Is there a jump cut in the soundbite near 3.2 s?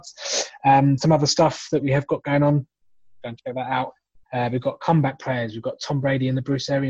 yes; 1 cut; at 3.2 s

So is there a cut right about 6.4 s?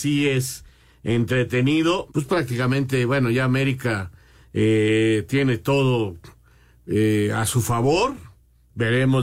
no; 1 cut; at 2.1 s

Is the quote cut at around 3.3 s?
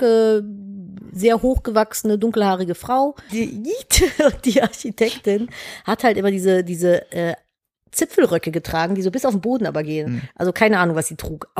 yes; 1 cut; at 3.3 s

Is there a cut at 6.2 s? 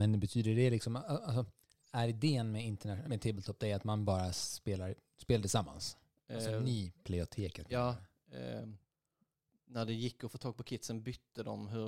yes; 2 cuts; at 3.1 s, 6.2 s

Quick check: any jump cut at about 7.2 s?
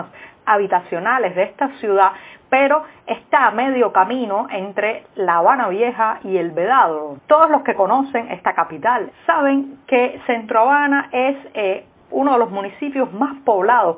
yes; 2 cuts; at 7.2 s, 9.1 s

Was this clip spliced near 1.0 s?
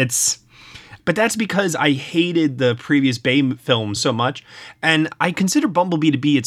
yes; 2 cuts; at 1.0 s, 4.0 s

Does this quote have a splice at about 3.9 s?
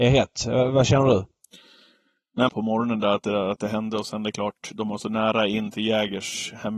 no; 1 cut; at 2.5 s

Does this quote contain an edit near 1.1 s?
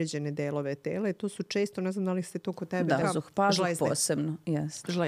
no; 1 cut; at 3.0 s

